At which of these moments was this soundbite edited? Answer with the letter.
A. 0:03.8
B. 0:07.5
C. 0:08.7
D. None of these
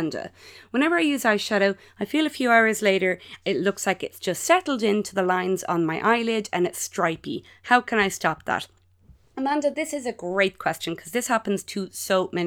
D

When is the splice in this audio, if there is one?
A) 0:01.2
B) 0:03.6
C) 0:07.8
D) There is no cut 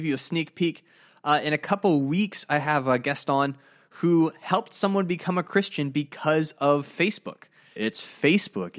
C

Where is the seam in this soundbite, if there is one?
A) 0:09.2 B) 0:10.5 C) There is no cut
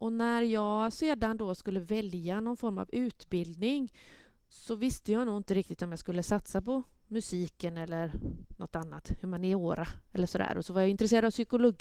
A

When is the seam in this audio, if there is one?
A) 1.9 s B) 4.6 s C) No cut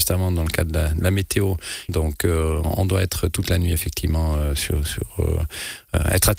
A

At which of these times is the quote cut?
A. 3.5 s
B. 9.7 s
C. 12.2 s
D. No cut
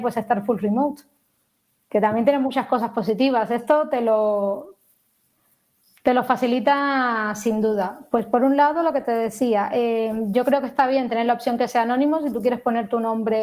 D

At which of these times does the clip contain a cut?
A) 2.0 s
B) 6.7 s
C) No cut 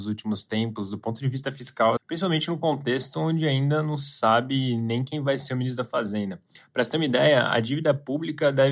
A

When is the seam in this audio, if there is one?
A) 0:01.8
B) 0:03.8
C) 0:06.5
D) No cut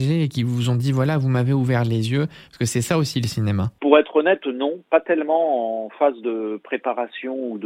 D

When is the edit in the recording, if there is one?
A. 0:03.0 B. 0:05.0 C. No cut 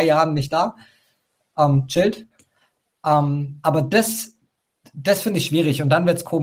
C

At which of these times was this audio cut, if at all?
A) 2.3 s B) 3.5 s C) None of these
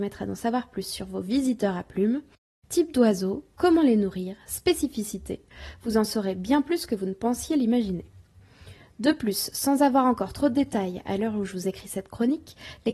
C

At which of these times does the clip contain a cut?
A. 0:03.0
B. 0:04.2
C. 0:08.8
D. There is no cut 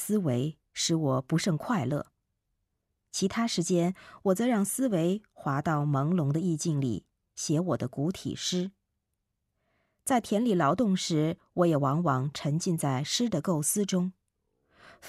D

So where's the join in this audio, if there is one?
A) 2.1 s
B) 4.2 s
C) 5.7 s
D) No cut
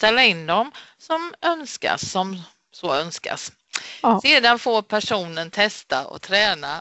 D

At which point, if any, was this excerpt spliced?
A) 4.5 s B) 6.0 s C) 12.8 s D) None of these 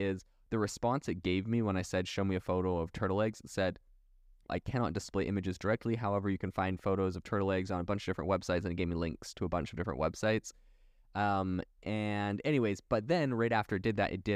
A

